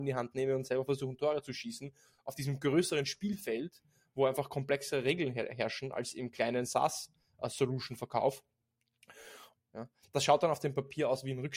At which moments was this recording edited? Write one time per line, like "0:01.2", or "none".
0:09.6